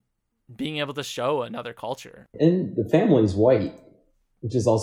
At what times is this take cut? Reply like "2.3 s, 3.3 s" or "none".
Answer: 2.3 s